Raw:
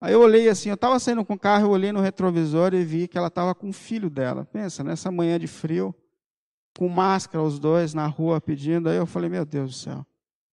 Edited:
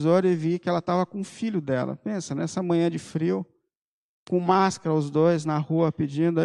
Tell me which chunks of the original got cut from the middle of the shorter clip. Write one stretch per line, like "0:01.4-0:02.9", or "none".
none